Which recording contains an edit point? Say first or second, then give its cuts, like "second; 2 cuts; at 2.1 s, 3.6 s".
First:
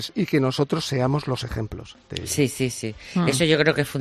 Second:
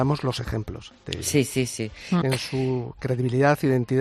second; 1 cut; at 2.2 s